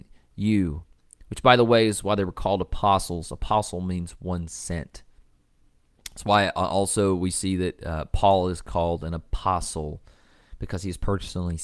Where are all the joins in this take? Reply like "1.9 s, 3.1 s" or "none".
none